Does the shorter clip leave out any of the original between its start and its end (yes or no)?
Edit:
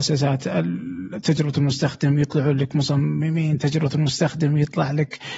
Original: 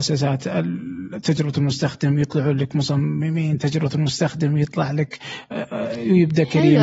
no